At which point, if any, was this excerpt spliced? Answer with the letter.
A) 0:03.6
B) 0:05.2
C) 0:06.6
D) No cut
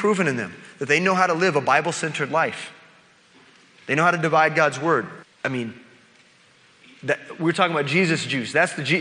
B